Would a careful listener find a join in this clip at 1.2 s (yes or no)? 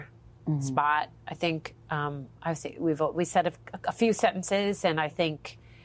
yes